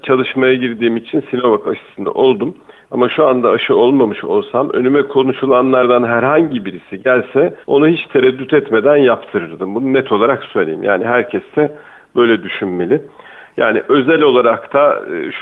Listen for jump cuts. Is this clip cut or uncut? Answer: cut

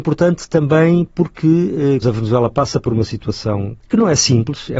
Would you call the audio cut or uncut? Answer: cut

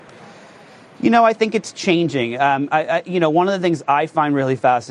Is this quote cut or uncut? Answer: uncut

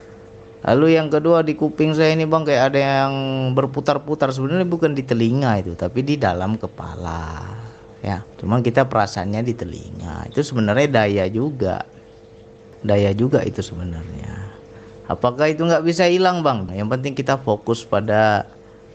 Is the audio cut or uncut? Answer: cut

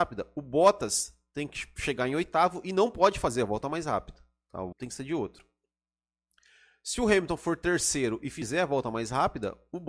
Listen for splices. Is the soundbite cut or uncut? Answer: cut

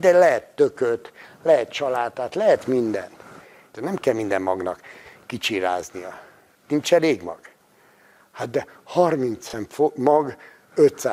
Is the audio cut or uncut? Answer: cut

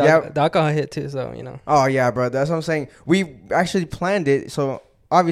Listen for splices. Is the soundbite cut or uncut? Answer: uncut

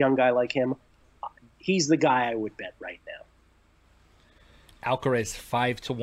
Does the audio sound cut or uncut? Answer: uncut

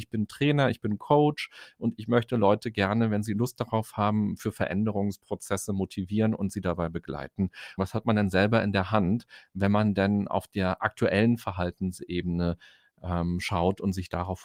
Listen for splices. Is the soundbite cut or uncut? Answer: cut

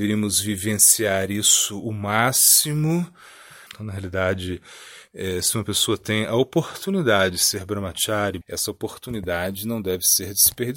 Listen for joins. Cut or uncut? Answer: cut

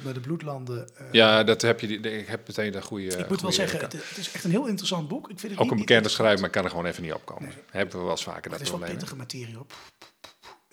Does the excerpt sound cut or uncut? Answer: uncut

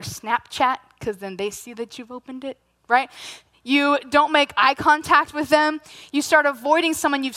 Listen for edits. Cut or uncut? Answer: uncut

